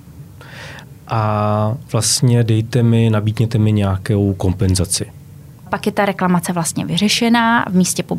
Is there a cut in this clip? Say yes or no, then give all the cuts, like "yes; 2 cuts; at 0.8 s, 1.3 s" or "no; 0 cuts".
yes; 1 cut; at 5.7 s